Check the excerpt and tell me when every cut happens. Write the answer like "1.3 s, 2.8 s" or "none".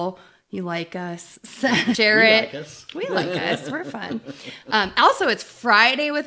none